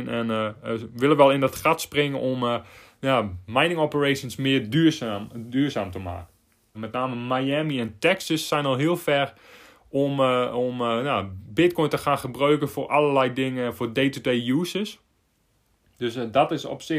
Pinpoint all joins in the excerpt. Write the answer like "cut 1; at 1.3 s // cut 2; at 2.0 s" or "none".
cut 1; at 6.7 s